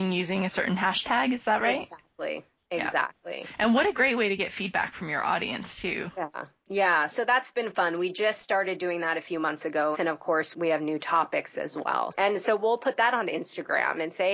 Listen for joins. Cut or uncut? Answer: cut